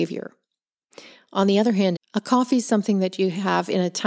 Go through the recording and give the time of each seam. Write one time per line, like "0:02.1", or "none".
0:01.9